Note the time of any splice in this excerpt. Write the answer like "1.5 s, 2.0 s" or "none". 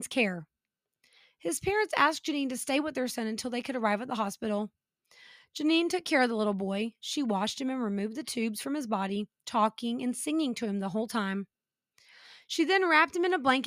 9.4 s